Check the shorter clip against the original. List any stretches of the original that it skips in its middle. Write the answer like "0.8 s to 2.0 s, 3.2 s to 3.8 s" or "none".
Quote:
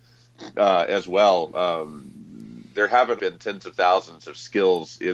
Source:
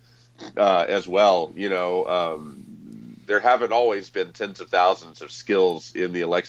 1.5 s to 2.1 s, 3.7 s to 4.1 s